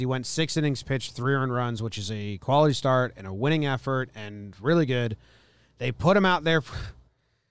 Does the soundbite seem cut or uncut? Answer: uncut